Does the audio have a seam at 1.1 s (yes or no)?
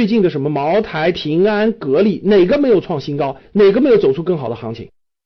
yes